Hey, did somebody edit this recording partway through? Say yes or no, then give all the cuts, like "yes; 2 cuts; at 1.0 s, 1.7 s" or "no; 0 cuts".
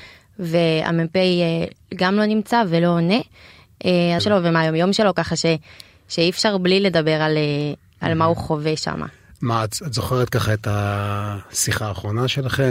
yes; 1 cut; at 4.2 s